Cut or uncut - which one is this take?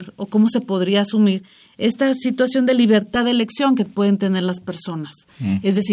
uncut